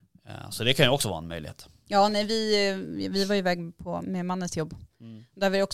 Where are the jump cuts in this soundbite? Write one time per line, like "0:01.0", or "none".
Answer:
none